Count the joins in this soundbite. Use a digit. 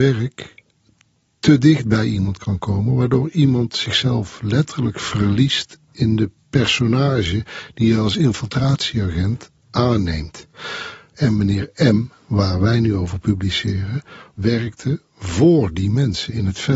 0